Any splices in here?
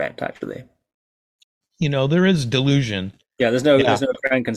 yes; 2 cuts; at 1.6 s, 3.2 s

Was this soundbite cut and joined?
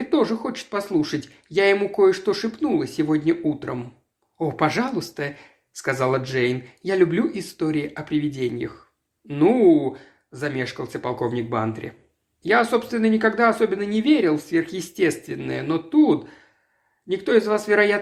no; 0 cuts

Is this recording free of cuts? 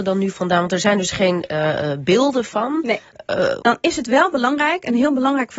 no; 1 cut; at 3.6 s

